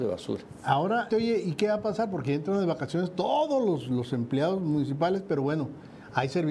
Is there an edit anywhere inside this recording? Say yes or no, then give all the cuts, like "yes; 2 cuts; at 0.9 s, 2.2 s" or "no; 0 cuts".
yes; 1 cut; at 1.1 s